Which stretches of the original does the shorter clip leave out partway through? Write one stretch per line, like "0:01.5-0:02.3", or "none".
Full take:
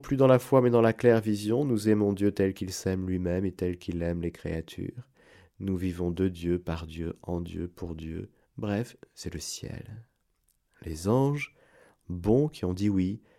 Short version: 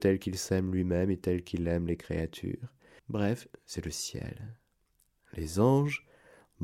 0:05.3-0:08.5